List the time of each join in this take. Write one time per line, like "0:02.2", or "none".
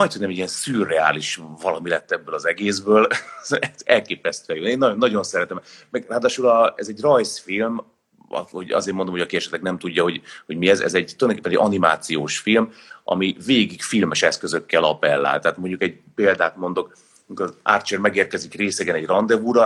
none